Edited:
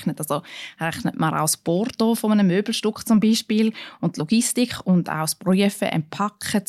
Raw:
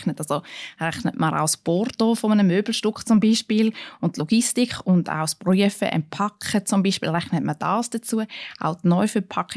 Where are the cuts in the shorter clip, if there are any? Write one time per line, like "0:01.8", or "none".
none